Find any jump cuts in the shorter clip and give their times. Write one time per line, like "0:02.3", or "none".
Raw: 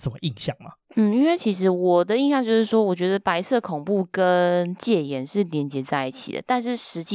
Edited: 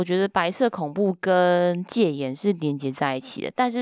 none